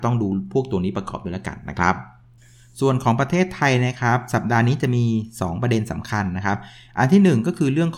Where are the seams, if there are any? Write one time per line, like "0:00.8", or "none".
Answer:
none